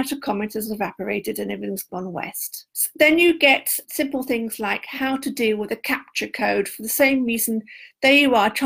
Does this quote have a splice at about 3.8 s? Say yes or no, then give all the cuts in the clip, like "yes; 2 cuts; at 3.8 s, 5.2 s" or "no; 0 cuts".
yes; 2 cuts; at 2.7 s, 3.8 s